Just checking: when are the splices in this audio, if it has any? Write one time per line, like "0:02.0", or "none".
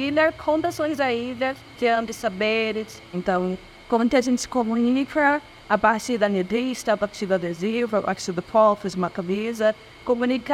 0:01.7
0:03.1